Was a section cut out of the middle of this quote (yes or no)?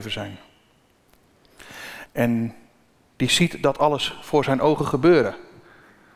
yes